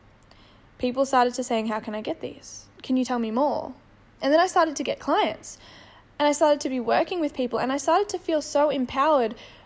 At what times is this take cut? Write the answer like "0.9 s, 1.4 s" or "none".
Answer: 4.2 s